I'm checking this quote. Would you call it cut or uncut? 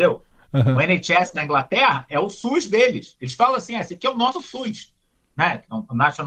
uncut